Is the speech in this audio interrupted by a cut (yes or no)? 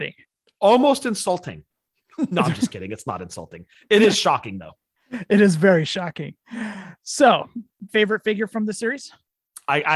yes